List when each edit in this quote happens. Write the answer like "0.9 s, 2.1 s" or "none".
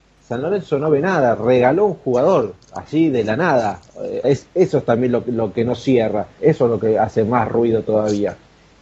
4.2 s, 6.4 s